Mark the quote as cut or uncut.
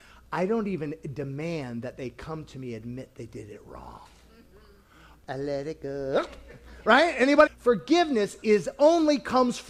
cut